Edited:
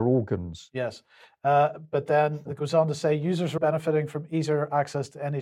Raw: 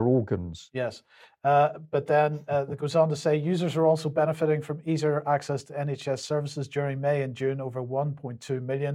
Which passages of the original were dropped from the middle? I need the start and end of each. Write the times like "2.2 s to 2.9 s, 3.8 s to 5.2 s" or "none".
2.5 s to 2.7 s, 3.8 s to 4.1 s